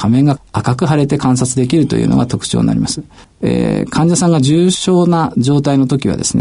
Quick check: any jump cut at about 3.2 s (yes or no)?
yes